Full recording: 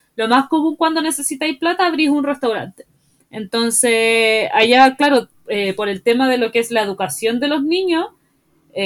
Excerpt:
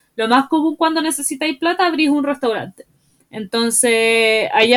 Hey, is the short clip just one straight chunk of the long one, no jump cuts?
yes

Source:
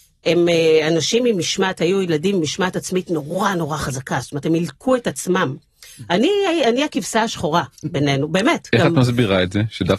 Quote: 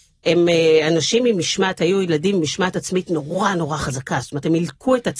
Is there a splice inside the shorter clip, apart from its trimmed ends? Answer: no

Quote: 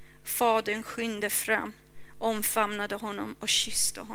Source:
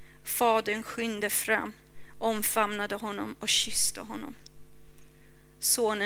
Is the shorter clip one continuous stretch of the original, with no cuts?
yes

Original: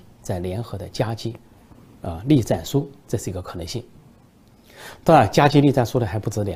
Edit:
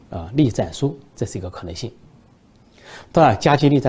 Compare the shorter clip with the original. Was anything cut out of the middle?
no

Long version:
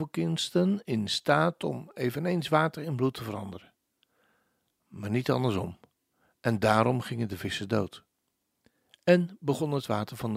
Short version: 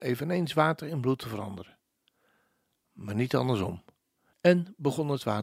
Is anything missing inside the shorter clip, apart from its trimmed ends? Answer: yes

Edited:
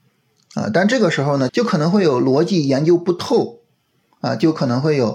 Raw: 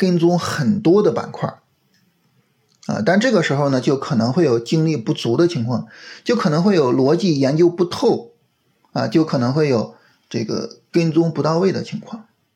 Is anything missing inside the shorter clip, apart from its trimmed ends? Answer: yes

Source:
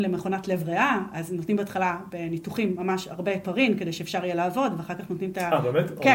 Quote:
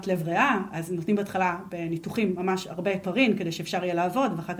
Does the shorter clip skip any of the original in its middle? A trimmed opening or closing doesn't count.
no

